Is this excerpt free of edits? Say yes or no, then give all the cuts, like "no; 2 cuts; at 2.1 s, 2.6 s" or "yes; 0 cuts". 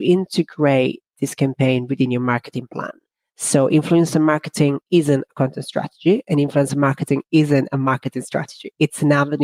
yes; 0 cuts